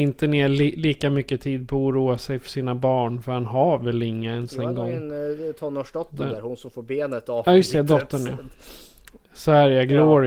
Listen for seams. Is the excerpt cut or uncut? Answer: uncut